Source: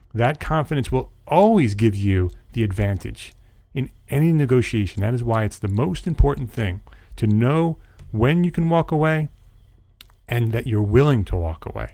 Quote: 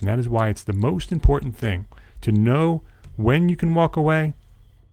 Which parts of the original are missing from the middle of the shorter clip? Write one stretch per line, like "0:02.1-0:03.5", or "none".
none

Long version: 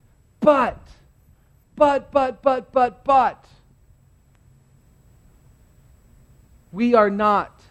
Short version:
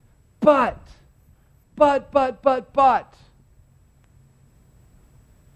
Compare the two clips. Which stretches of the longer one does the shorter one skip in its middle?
0:02.7-0:03.0

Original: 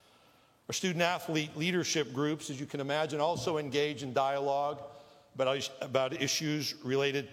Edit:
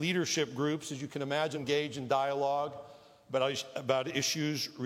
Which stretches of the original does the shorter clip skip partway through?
0:03.1-0:03.6

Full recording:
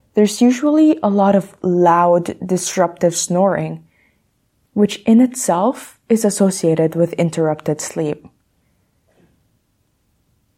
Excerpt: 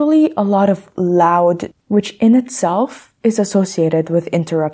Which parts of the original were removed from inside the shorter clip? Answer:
0:02.4-0:04.6

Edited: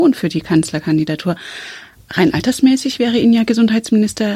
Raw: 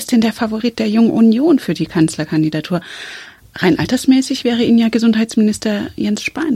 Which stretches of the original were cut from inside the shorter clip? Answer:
none

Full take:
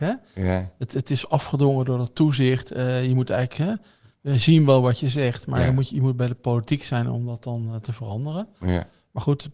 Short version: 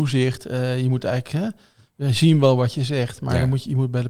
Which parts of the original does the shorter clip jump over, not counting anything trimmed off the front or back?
none

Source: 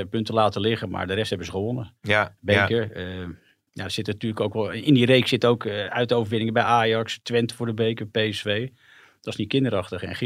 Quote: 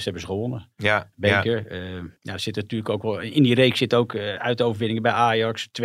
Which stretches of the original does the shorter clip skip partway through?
0:03.4-0:03.7

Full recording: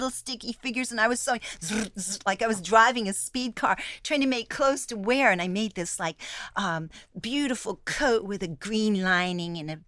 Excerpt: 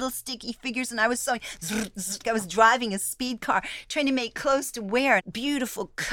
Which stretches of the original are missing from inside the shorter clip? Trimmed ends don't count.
0:02.2-0:02.4
0:05.3-0:07.1

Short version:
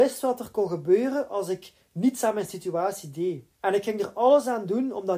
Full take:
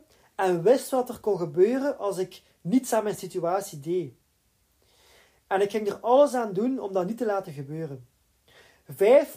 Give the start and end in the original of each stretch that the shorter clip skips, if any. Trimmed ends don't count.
0:04.2-0:05.4

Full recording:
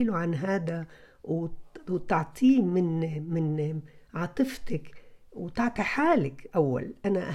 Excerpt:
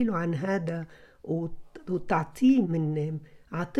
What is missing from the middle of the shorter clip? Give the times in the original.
0:02.6-0:03.3

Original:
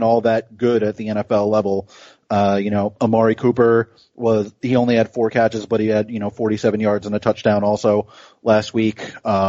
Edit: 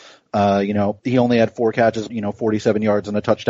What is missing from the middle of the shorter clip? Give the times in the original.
0:03.0-0:04.6
0:05.7-0:06.1

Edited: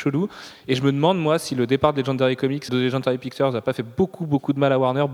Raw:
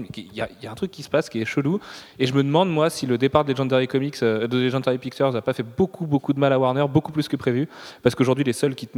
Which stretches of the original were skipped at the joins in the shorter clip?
0:04.2-0:04.5

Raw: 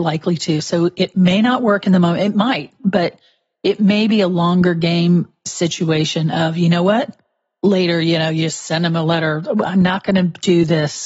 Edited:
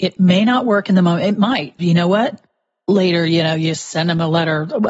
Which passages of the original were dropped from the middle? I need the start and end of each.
0:02.8-0:06.5

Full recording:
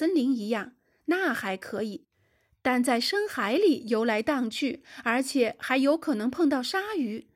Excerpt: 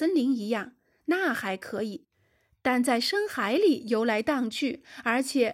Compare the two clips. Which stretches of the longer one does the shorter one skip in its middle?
none

